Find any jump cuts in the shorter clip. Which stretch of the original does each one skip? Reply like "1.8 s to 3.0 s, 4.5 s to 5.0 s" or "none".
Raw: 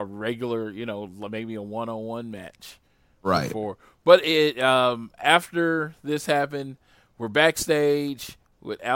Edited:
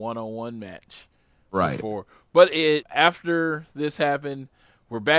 4.5 s to 5.1 s